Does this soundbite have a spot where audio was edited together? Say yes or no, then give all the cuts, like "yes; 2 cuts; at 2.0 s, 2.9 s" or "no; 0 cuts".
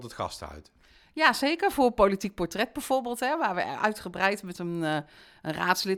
no; 0 cuts